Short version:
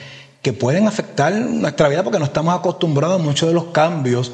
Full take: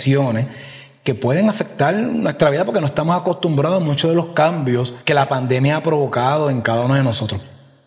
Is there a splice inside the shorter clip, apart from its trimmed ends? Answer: no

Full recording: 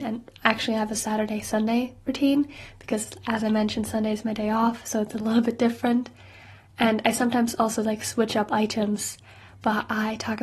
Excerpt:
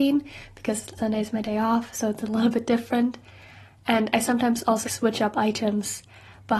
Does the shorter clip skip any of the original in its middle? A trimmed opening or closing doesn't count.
yes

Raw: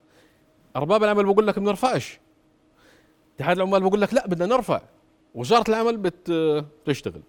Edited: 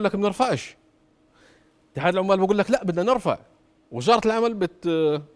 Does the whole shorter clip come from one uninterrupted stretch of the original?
yes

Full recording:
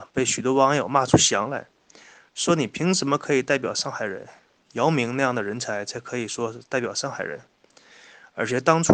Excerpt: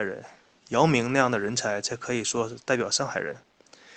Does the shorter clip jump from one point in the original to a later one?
no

